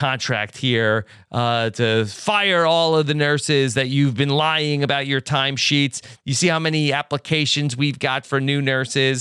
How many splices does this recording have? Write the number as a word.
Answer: zero